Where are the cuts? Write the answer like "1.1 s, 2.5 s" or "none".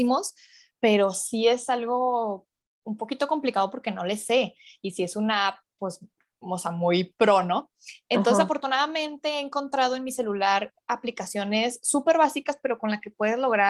none